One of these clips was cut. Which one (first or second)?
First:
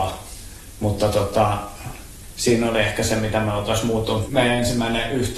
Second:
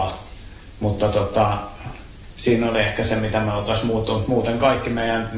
first